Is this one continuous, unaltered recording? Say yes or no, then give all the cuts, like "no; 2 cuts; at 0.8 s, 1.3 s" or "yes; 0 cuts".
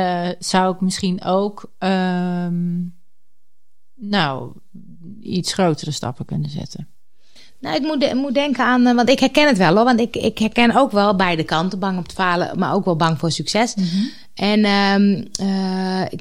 yes; 0 cuts